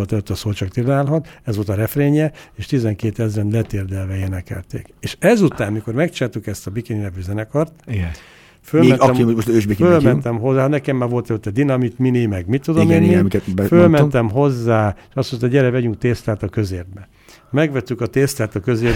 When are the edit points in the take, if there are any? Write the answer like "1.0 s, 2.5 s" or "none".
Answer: none